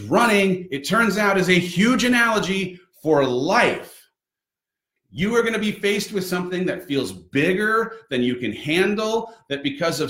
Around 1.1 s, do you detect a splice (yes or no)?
no